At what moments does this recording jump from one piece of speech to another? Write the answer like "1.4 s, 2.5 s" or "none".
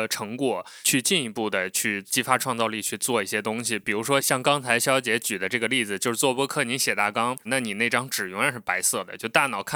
7.5 s

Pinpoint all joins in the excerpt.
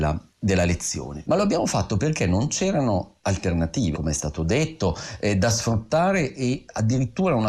1.2 s, 3.9 s

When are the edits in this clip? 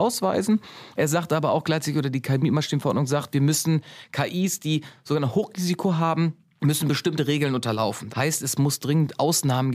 8.1 s

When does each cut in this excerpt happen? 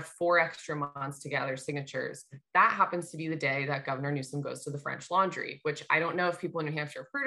none

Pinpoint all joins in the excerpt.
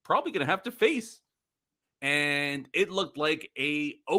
1.8 s

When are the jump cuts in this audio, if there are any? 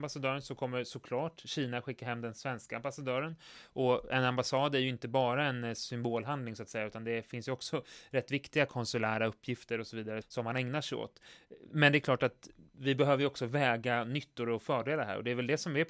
10.2 s, 11.7 s

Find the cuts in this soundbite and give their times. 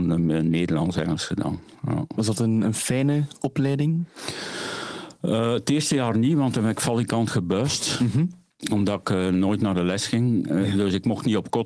none

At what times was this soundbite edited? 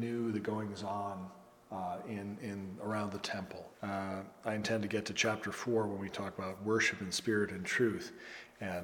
3.7 s

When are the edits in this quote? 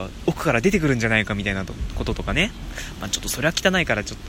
none

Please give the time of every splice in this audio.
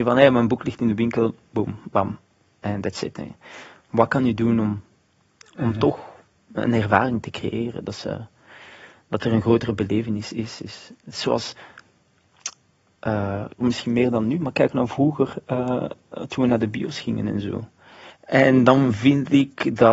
13.6 s, 18.1 s

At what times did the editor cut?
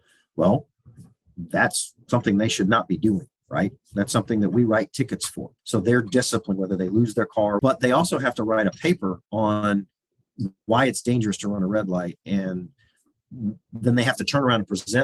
5.6 s, 7.6 s

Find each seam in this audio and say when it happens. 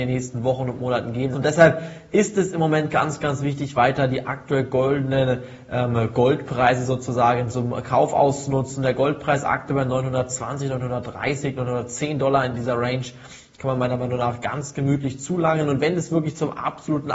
1.3 s

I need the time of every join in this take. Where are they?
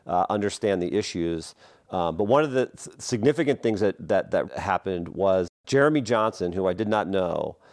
4.4 s

